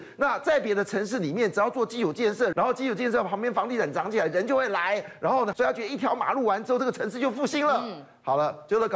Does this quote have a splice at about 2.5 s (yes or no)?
yes